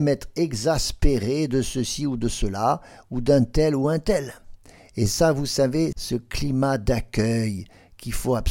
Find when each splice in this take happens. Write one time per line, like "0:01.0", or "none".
0:05.9